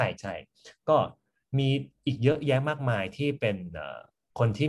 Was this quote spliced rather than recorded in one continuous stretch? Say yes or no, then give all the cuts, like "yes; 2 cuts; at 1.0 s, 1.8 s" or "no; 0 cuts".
no; 0 cuts